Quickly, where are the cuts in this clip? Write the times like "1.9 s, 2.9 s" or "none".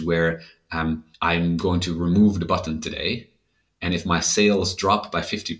1.1 s